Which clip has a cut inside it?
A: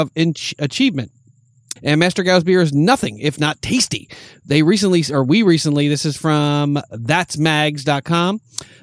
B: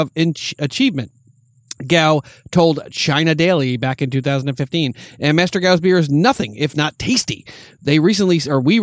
A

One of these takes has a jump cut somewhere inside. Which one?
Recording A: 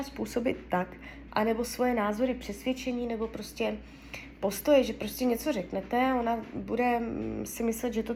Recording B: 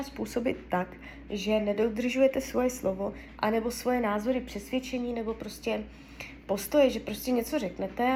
A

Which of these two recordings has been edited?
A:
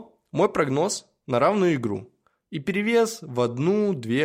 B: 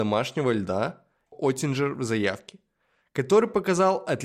B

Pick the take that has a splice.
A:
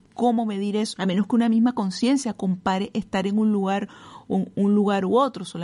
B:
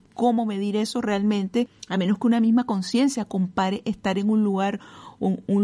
A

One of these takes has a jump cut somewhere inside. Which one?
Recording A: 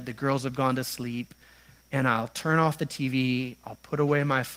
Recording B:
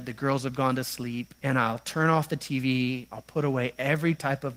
B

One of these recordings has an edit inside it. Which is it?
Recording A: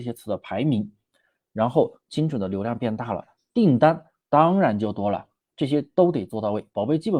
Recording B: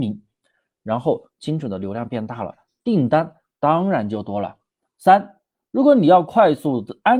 A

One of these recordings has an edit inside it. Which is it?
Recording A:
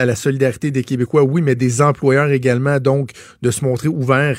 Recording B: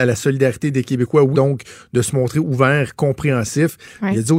B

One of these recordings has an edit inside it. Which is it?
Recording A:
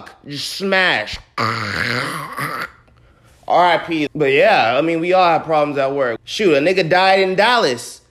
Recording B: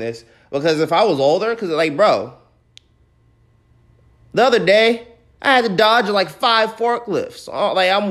A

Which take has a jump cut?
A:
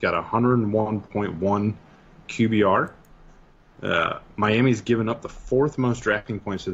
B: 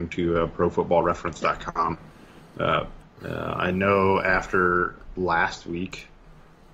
B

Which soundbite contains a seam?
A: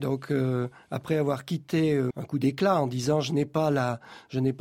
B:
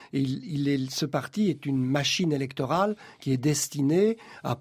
A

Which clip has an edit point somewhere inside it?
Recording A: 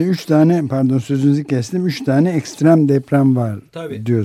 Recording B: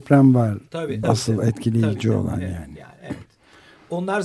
B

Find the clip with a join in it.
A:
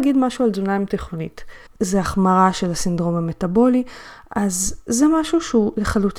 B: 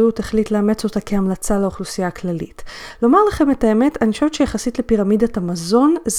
A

